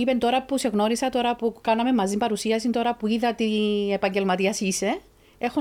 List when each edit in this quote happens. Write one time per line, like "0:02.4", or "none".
none